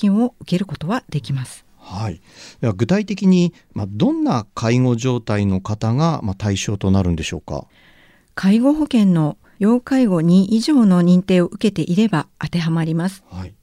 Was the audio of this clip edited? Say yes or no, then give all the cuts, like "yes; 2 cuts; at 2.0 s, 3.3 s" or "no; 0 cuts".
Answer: no; 0 cuts